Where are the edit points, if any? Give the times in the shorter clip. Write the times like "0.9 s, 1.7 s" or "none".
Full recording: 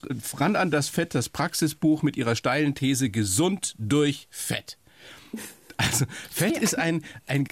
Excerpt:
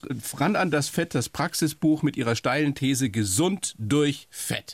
none